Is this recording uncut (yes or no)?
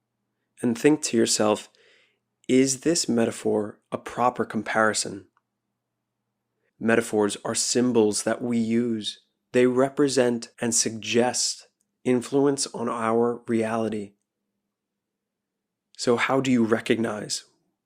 no